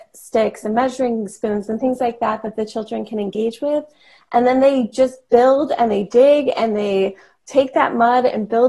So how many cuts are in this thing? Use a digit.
0